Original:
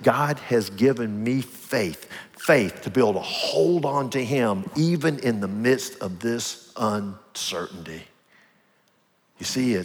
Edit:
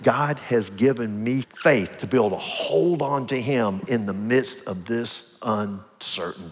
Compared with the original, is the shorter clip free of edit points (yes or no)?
no